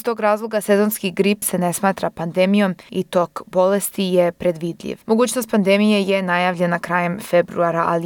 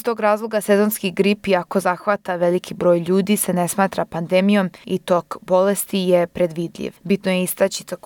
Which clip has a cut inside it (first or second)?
first